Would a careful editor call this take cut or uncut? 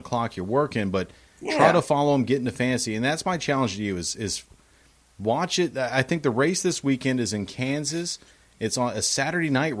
uncut